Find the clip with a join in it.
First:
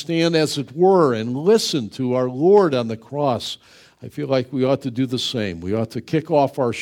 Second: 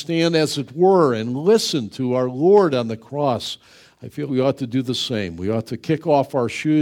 second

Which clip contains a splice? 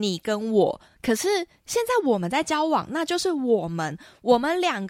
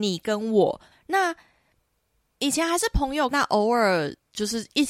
second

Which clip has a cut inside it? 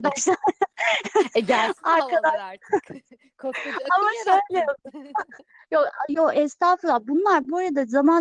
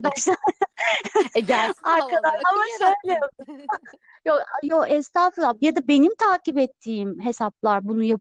second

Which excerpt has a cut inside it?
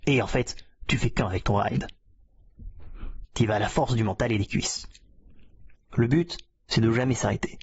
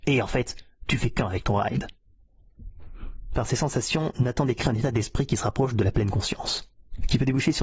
first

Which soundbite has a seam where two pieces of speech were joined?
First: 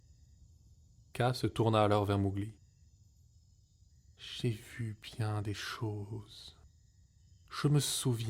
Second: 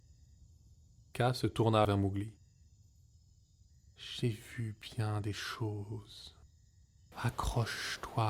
second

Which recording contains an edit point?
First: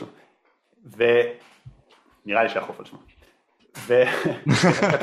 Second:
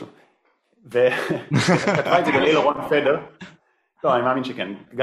second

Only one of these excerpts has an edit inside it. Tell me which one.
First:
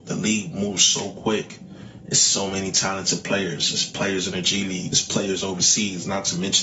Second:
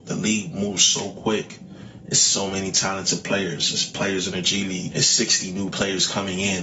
second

